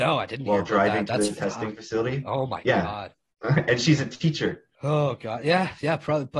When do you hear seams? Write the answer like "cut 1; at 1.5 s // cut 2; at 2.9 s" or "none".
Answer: cut 1; at 4.7 s